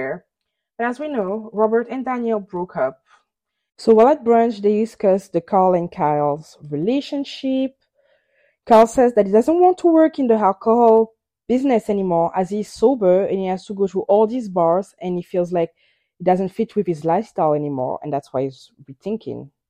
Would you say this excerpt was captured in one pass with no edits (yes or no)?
no